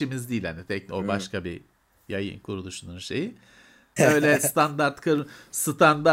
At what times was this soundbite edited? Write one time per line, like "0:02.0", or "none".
0:04.0